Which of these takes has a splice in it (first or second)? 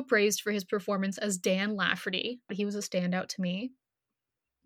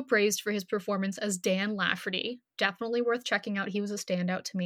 first